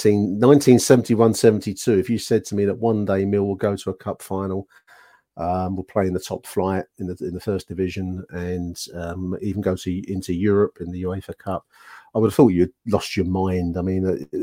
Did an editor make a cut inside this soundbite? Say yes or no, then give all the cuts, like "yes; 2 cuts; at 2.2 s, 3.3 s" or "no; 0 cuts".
no; 0 cuts